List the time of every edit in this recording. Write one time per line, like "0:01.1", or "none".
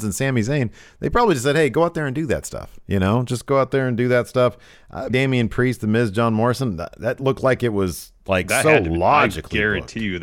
0:05.1